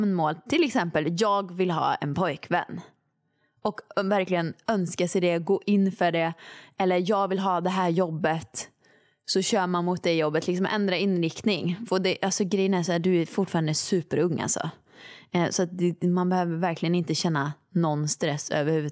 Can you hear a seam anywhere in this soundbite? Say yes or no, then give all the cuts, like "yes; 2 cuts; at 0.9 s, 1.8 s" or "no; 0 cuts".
no; 0 cuts